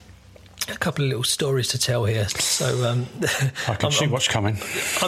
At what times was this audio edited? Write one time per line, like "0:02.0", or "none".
0:02.3